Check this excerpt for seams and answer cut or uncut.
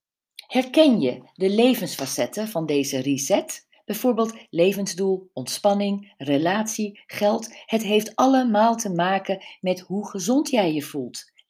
uncut